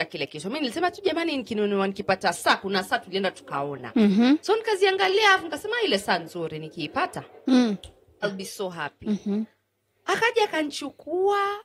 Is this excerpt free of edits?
no; 1 cut; at 8.2 s

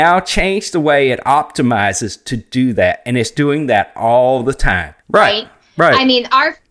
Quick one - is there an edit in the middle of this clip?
yes; 1 cut; at 5.0 s

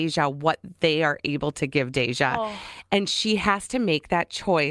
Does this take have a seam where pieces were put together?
no; 0 cuts

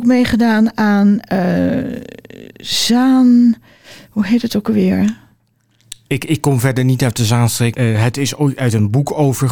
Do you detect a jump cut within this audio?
yes; 2 cuts; at 6.1 s, 7.7 s

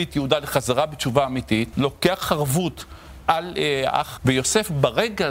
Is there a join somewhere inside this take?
yes; 2 cuts; at 1.7 s, 4.2 s

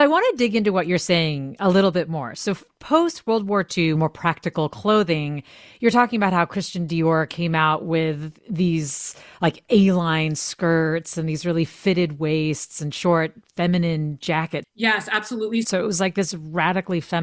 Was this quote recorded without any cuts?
no; 3 cuts; at 3.9 s, 14.6 s, 15.6 s

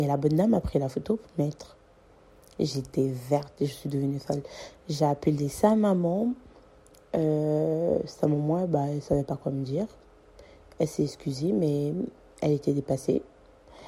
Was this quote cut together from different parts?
no; 0 cuts

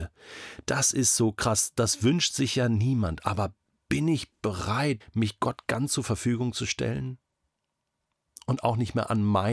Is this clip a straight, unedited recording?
no; 1 cut; at 5.0 s

